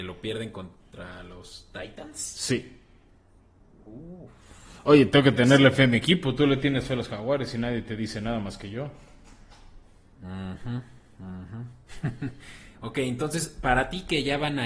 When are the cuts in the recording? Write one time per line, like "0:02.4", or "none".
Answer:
none